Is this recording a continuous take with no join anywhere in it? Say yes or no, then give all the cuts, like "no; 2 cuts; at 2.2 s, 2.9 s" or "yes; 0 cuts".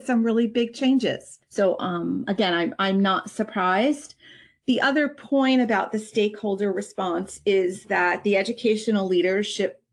yes; 0 cuts